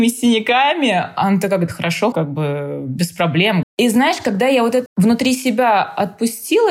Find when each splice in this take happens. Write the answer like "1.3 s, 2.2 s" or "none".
2.1 s, 3.6 s, 4.9 s